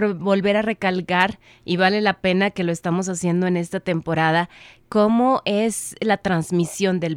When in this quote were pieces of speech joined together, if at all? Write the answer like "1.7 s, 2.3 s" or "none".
none